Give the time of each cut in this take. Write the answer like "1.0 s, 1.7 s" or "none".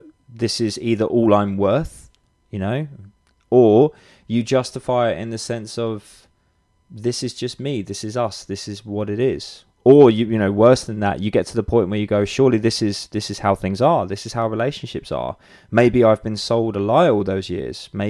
none